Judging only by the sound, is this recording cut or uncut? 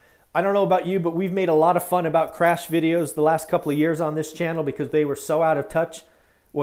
uncut